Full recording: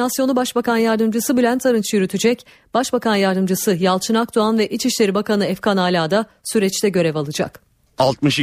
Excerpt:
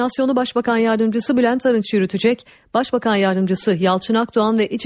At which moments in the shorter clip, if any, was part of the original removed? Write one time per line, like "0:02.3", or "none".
none